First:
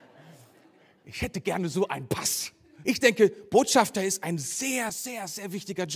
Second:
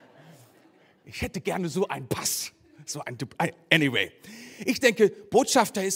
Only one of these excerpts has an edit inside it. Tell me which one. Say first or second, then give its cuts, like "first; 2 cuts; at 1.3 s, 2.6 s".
first; 2 cuts; at 2.8 s, 4.9 s